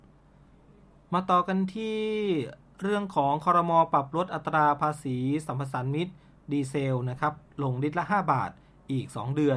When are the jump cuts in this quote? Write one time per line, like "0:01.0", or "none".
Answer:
none